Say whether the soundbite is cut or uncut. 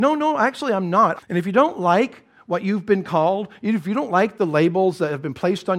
cut